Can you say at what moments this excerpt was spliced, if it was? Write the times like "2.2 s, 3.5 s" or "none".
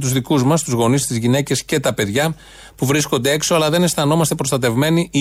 1.0 s